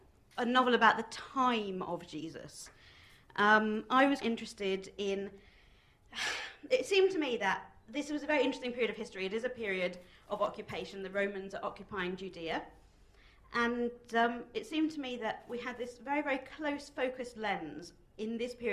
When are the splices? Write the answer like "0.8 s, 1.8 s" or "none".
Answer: 4.2 s